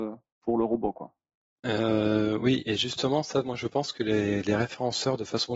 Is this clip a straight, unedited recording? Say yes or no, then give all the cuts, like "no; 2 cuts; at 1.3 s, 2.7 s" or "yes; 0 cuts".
yes; 0 cuts